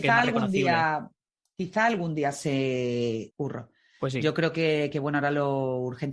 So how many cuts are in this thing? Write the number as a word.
one